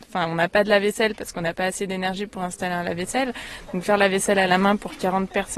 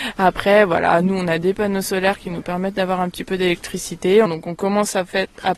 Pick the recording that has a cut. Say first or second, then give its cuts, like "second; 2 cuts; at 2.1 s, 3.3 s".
second; 1 cut; at 4.2 s